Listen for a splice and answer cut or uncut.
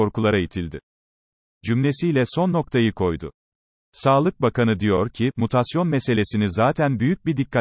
cut